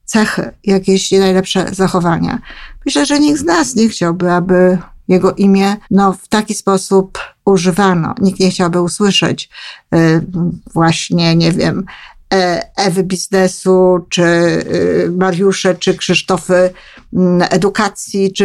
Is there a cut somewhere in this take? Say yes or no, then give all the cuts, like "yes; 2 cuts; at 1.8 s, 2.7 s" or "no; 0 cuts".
yes; 1 cut; at 5.8 s